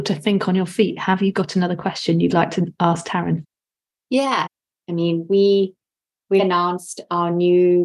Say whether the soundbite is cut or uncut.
cut